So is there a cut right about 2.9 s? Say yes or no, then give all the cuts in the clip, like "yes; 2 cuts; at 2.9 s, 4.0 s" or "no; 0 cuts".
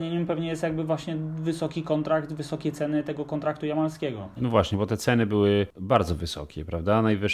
no; 1 cut; at 4.4 s